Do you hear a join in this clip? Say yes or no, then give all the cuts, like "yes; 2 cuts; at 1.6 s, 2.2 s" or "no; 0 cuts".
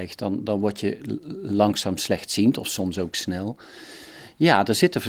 no; 0 cuts